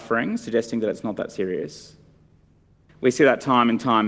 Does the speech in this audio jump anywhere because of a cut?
yes; 1 cut; at 2.9 s

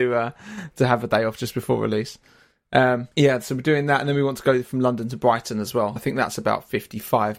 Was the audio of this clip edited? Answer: yes; 2 cuts; at 3.1 s, 6.0 s

